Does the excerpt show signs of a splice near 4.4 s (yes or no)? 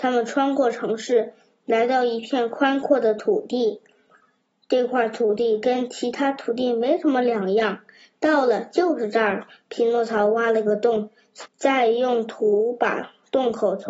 no